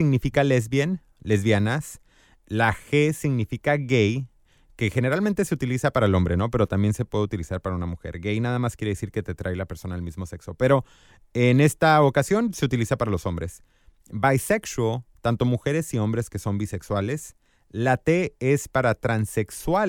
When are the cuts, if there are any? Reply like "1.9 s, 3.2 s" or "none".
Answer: 15.2 s